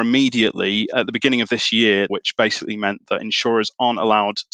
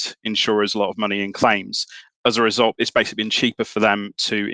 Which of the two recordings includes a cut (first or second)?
first